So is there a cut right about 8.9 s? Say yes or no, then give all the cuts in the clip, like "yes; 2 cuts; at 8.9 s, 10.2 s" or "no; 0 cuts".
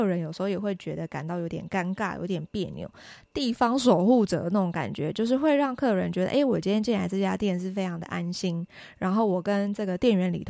no; 1 cut; at 3.3 s